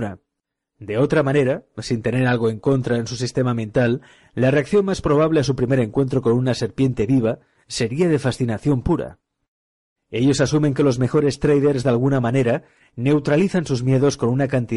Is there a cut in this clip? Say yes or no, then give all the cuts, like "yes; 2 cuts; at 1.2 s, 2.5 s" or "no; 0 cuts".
yes; 1 cut; at 10.0 s